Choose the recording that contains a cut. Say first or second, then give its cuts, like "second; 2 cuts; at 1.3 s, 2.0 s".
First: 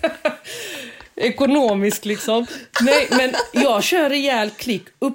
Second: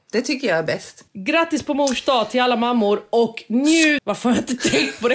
second; 2 cuts; at 1.1 s, 4.0 s